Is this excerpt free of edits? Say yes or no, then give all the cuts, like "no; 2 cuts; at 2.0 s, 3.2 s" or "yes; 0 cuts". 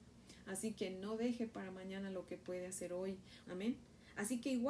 no; 1 cut; at 3.4 s